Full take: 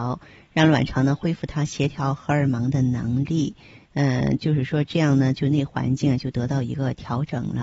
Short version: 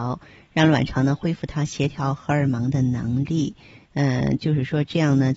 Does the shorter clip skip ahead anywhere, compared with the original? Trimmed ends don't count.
no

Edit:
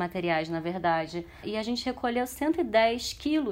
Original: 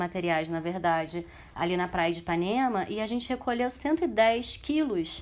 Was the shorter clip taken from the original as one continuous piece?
no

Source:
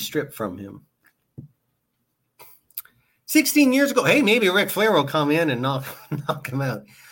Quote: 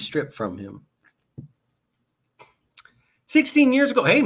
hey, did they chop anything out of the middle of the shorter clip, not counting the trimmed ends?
no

